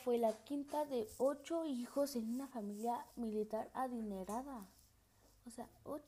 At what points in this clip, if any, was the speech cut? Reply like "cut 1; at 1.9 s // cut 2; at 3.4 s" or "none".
none